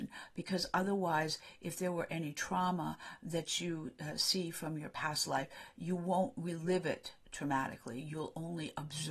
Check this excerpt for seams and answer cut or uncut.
uncut